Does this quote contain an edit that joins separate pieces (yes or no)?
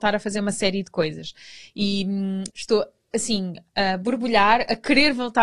yes